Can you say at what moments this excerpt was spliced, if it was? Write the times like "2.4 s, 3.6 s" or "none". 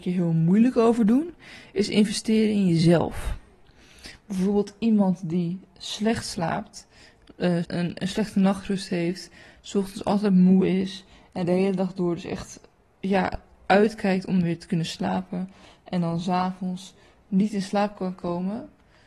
7.6 s